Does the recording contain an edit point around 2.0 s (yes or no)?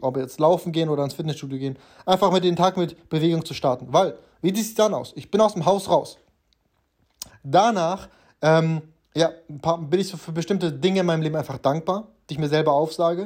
no